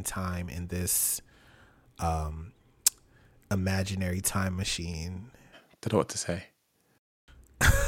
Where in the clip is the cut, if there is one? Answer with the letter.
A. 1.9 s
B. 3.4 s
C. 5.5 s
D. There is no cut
C